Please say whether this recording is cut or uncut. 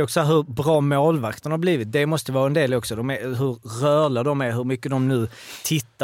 uncut